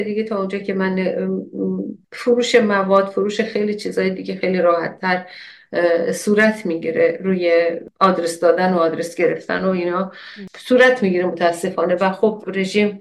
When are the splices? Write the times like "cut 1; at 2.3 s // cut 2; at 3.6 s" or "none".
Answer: cut 1; at 2.0 s